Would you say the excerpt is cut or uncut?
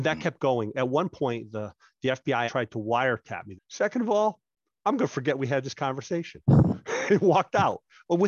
cut